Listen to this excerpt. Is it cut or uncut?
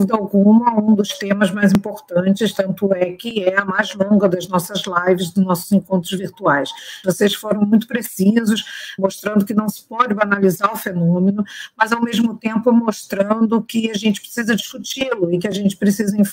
cut